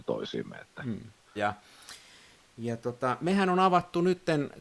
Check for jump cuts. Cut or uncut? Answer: cut